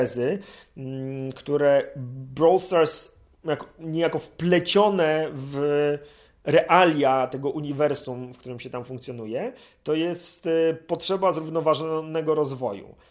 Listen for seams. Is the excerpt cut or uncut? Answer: uncut